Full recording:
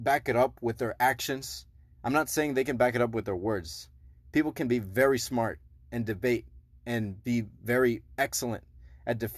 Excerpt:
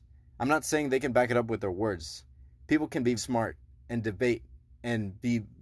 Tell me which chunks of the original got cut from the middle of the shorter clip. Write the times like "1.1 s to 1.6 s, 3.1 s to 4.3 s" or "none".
4.8 s to 5.2 s